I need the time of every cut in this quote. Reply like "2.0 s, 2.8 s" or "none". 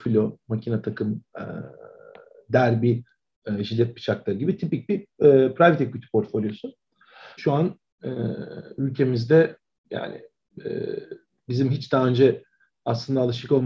7.4 s